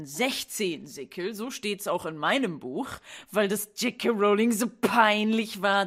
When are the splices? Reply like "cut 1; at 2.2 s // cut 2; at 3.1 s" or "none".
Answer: none